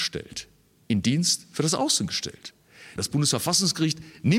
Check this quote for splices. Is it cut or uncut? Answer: cut